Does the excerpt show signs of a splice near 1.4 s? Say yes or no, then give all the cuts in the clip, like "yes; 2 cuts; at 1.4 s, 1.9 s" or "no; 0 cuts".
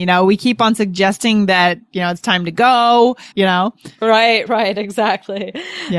no; 2 cuts; at 3.3 s, 4.5 s